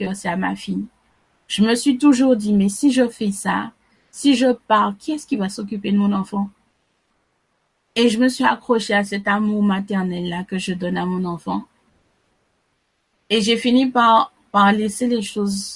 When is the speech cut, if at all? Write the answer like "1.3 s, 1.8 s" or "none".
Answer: 7.9 s